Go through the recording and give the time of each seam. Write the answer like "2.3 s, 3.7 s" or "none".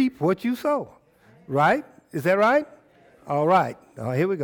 none

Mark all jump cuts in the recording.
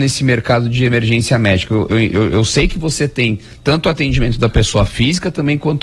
none

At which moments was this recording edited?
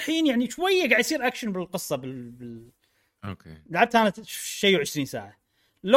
none

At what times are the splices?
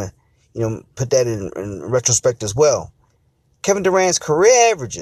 none

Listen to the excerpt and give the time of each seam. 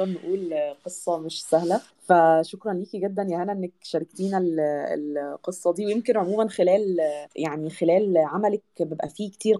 1.9 s, 7.3 s

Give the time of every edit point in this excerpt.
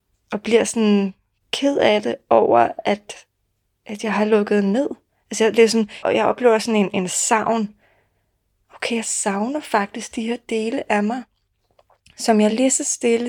6.0 s

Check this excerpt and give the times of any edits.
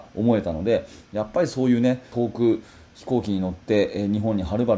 2.1 s

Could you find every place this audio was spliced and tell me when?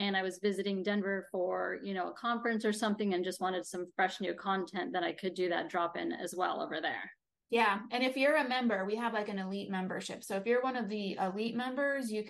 none

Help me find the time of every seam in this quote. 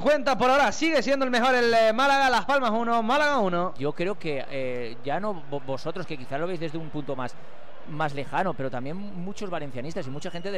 3.8 s

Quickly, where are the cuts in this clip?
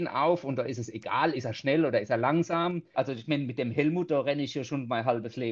2.9 s

